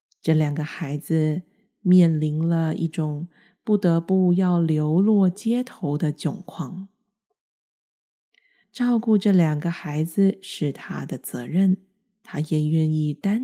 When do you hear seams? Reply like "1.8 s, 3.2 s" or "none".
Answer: 8.6 s